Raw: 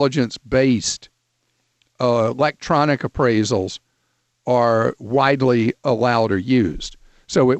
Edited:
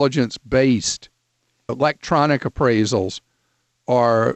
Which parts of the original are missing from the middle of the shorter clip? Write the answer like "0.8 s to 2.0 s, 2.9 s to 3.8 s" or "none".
1.7 s to 2.3 s